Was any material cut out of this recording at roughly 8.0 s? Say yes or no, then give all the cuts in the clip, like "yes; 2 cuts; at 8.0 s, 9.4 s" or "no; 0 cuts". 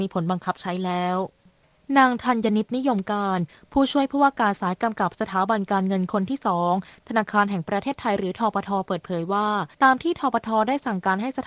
no; 1 cut; at 9.7 s